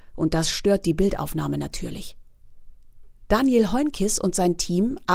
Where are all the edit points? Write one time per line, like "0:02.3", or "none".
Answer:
none